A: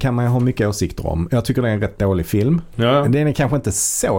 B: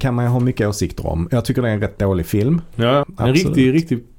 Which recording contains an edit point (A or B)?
B